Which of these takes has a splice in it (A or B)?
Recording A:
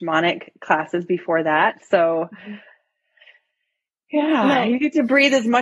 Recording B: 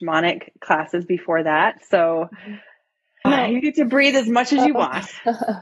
B